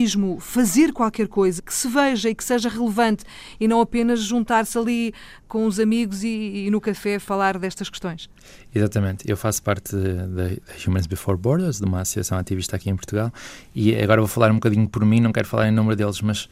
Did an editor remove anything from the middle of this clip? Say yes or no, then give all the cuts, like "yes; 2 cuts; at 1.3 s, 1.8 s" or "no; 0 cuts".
yes; 1 cut; at 1.6 s